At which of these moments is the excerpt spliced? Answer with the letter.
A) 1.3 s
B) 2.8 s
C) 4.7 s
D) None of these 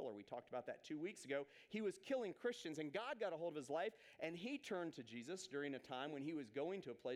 D